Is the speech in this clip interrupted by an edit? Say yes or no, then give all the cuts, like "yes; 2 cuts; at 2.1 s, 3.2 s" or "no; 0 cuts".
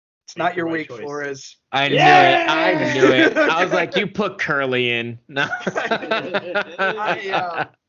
no; 0 cuts